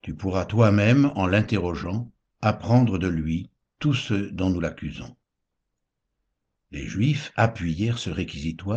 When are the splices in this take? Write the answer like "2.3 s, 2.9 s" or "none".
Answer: none